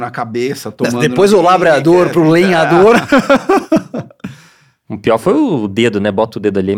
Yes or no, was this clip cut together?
no